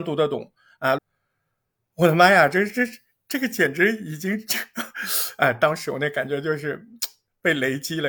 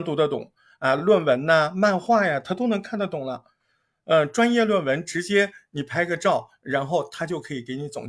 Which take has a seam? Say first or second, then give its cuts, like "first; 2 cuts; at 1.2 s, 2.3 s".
first; 1 cut; at 1.0 s